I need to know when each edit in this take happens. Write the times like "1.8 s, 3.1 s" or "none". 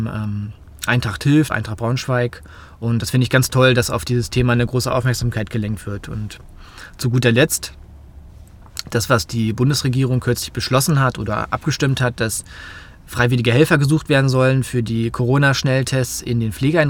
1.5 s